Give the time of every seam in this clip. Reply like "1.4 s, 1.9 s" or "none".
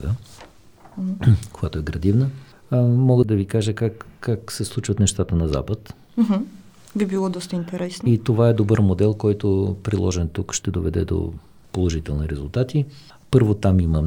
none